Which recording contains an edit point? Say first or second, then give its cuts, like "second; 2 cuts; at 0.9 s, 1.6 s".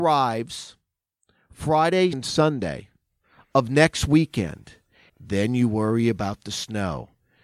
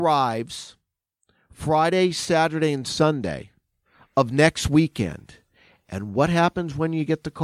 first; 2 cuts; at 2.1 s, 5.1 s